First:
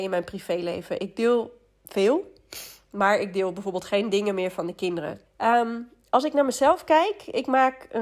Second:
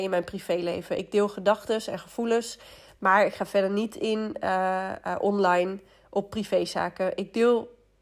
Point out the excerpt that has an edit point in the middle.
first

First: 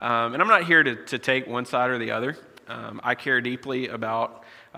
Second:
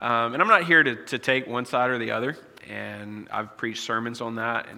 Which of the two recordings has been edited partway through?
second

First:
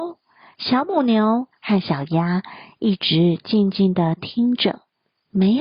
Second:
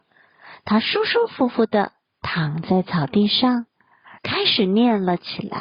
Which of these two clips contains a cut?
second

